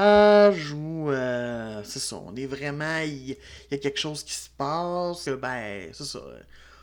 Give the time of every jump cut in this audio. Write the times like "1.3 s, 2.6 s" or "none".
5.3 s